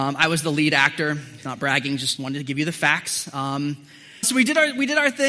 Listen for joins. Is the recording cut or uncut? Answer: cut